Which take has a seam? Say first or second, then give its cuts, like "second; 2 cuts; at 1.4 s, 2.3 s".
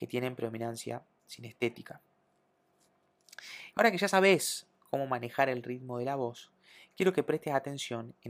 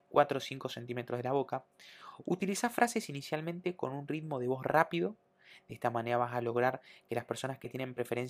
first; 1 cut; at 3.7 s